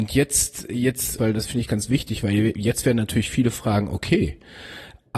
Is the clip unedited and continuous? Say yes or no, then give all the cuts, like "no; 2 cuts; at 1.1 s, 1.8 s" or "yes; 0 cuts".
no; 1 cut; at 1.2 s